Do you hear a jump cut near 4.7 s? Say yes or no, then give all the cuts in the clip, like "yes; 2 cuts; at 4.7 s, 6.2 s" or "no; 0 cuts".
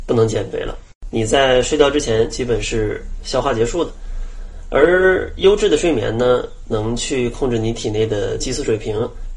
no; 1 cut; at 1.1 s